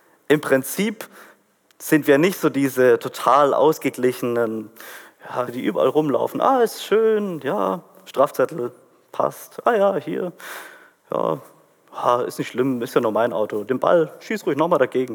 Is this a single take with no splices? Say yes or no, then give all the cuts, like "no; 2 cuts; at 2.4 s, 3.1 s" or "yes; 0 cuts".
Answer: no; 1 cut; at 5.5 s